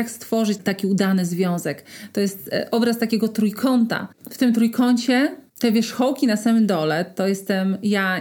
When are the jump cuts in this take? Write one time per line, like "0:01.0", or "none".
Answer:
none